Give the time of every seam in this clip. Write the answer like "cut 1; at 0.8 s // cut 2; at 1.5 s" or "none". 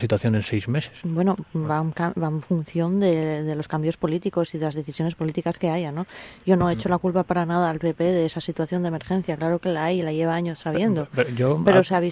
none